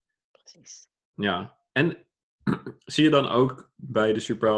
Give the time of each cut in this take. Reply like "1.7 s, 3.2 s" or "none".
none